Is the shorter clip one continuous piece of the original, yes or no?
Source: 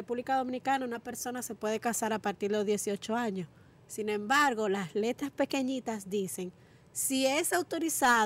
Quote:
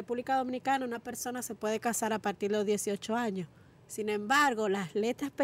yes